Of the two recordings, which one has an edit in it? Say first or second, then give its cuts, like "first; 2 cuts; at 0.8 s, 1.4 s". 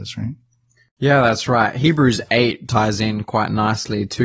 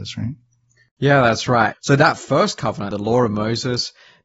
second; 2 cuts; at 1.7 s, 2.9 s